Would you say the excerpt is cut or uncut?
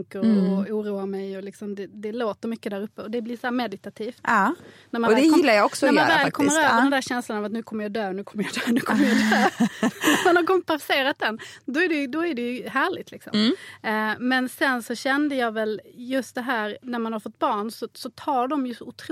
uncut